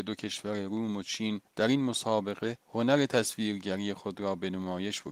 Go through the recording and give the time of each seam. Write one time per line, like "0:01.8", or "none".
0:01.5
0:02.6